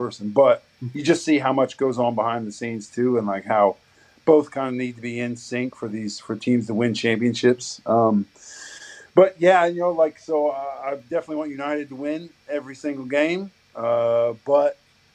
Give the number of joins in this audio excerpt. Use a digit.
0